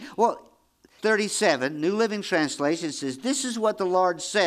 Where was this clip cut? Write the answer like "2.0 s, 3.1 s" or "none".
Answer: 1.0 s